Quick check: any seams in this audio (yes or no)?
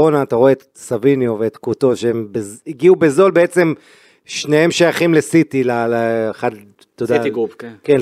no